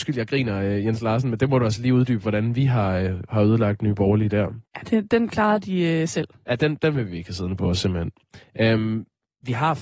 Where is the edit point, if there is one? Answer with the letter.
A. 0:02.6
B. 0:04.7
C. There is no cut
B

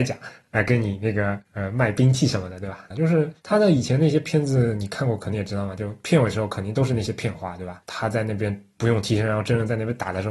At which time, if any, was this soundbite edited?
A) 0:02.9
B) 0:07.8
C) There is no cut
A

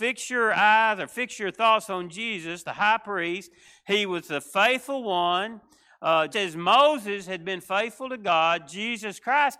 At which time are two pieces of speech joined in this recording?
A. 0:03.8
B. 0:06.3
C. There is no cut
B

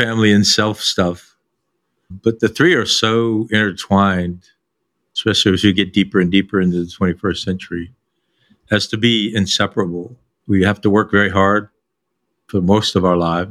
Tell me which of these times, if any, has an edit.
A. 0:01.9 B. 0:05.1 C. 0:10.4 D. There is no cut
C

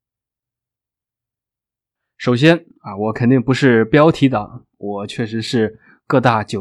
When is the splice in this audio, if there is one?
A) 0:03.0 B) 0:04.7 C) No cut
B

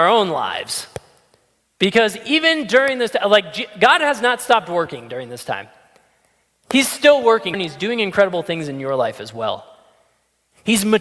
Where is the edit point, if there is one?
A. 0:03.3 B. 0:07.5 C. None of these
B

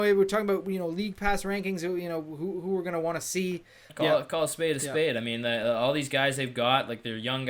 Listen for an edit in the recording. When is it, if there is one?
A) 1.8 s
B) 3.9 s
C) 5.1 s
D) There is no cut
B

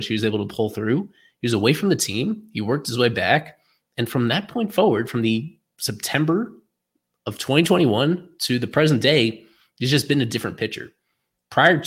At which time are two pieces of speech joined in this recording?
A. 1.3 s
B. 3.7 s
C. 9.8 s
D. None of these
D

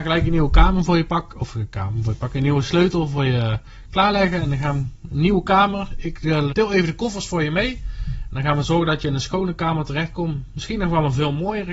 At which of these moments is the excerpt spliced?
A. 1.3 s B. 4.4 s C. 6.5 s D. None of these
C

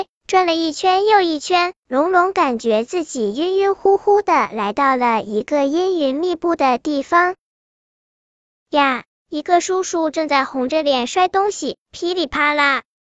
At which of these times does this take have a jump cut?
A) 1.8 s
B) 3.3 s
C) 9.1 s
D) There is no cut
C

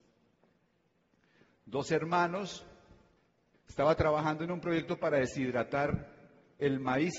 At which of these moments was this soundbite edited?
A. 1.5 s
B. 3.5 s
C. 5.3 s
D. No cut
B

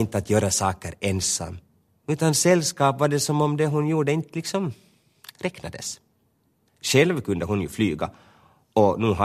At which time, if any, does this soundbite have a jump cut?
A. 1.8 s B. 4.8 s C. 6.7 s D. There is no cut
C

